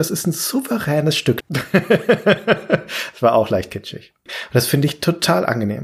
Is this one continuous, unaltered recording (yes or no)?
no